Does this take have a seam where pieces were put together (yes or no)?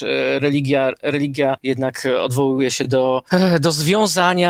no